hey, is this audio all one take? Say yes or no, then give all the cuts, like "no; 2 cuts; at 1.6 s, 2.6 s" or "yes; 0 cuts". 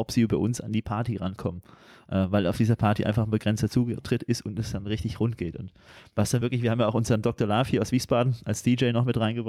yes; 0 cuts